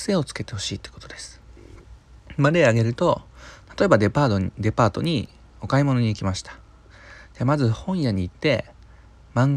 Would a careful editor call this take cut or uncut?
uncut